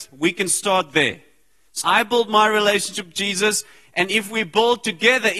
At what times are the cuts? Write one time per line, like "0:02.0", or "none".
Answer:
0:01.8